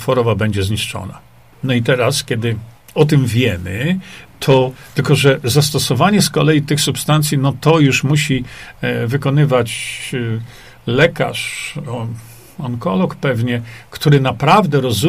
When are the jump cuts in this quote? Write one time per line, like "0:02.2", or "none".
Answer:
0:01.5